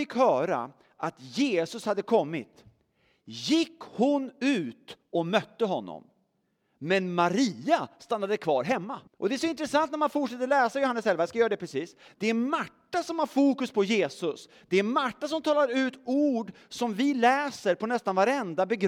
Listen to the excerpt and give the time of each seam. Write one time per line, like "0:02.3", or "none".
0:09.1
0:12.1